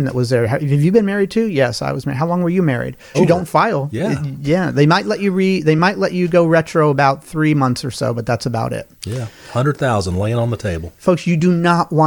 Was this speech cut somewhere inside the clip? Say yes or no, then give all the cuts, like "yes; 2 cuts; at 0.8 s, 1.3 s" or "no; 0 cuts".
yes; 1 cut; at 3.1 s